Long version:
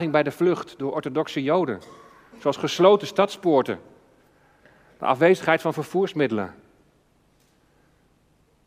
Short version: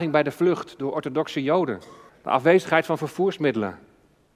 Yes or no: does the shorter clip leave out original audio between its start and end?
yes